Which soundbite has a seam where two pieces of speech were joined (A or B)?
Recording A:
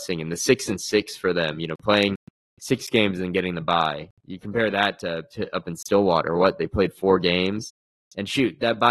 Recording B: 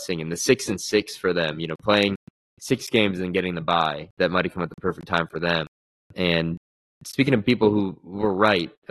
B